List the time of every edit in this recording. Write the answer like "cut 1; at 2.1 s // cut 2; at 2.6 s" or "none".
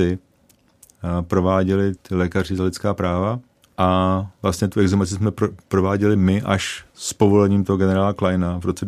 cut 1; at 2.0 s // cut 2; at 3.6 s // cut 3; at 6.9 s